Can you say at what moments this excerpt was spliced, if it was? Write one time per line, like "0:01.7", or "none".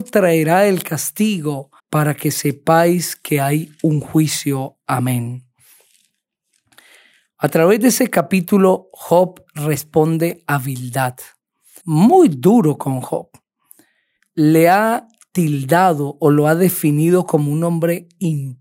0:01.8
0:11.8